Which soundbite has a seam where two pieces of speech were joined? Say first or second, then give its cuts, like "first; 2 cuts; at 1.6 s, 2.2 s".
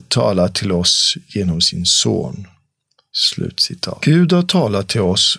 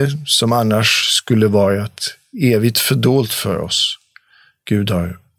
first; 1 cut; at 4.0 s